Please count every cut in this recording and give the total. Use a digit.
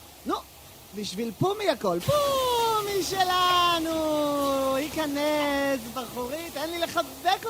1